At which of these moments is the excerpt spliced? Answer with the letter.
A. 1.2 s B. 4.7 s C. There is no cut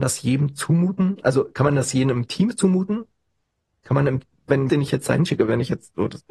B